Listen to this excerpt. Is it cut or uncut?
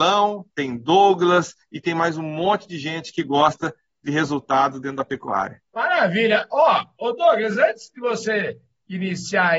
cut